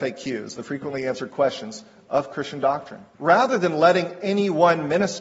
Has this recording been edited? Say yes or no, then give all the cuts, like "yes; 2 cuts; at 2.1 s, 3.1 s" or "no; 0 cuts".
yes; 1 cut; at 3.1 s